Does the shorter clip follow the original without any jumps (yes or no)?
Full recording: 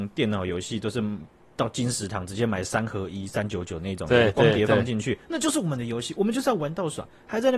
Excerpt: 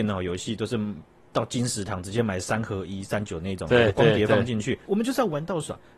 no